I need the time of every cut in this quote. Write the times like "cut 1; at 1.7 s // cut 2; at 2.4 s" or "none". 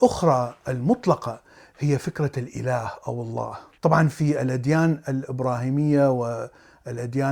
cut 1; at 3.8 s